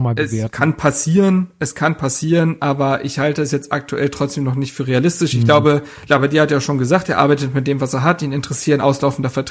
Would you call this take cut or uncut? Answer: uncut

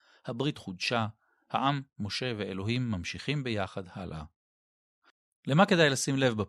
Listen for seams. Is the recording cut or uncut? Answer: uncut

